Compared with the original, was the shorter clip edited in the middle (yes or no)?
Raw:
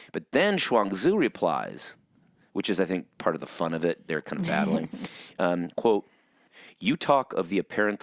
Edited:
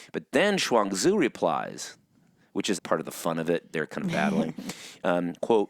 yes